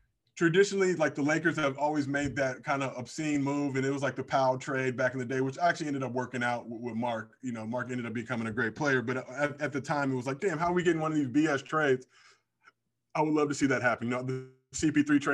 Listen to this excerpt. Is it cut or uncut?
uncut